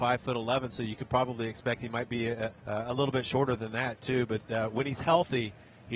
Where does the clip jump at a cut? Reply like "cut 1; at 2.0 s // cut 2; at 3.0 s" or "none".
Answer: cut 1; at 2.6 s